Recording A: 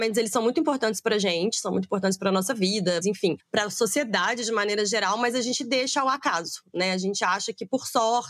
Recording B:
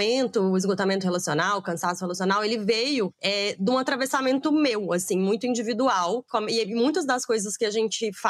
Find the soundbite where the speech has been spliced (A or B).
A